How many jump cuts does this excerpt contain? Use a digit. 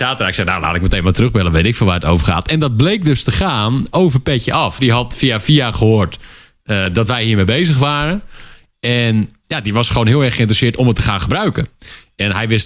2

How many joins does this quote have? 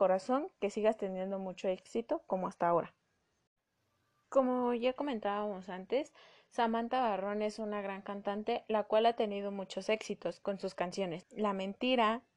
2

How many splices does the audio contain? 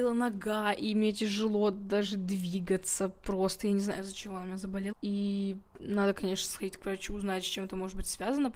1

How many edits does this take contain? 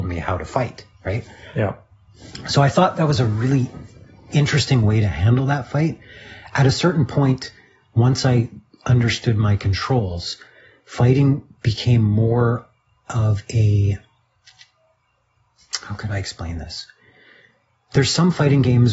0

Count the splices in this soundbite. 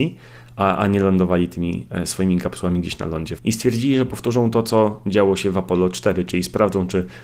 1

